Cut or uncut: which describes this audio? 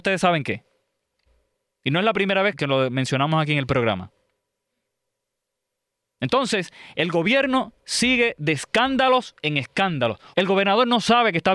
cut